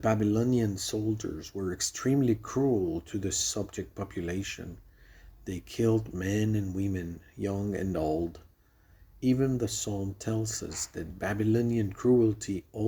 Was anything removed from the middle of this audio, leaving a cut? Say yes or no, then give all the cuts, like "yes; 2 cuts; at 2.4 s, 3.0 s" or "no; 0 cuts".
no; 0 cuts